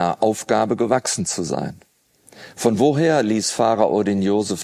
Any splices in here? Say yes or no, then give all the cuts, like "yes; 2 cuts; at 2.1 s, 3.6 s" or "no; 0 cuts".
no; 0 cuts